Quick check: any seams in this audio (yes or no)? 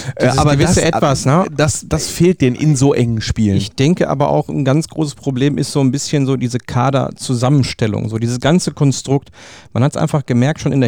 no